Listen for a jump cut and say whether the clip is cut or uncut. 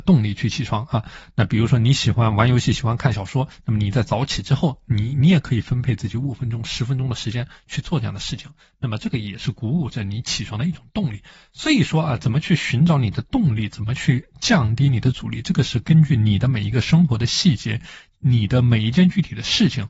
uncut